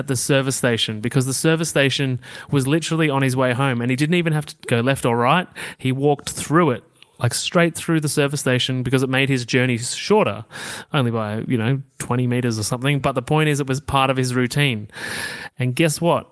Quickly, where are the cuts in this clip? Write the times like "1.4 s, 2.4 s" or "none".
none